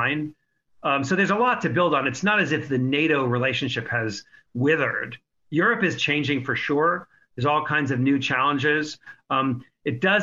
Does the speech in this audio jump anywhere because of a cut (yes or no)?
no